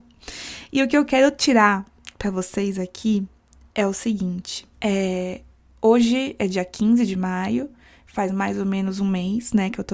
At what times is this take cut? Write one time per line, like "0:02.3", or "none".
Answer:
0:04.7